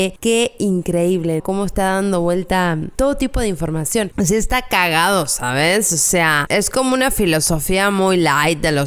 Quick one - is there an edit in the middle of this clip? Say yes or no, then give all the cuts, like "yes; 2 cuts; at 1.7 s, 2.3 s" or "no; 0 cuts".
no; 0 cuts